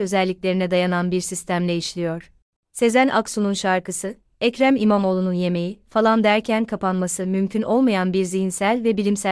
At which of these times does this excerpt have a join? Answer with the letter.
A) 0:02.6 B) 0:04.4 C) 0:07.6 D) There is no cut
A